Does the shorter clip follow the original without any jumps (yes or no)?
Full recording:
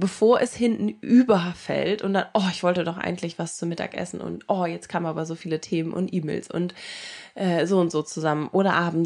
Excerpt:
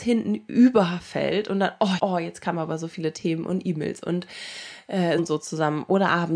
no